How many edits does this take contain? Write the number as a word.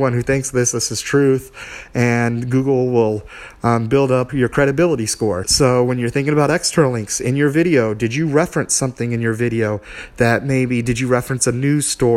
two